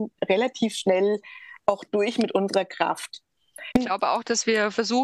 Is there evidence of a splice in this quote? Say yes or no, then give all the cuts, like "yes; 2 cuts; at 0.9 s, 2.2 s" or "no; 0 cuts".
yes; 1 cut; at 3.7 s